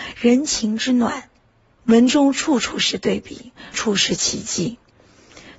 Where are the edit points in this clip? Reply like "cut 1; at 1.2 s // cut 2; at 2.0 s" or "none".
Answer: cut 1; at 3.7 s